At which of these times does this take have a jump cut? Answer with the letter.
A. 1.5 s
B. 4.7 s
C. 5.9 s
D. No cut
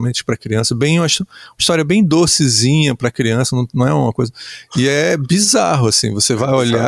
B